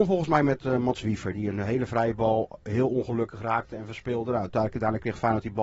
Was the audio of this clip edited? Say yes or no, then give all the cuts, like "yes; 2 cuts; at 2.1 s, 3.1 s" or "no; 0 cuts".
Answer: no; 0 cuts